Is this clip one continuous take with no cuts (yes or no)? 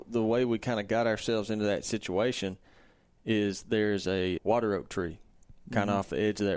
no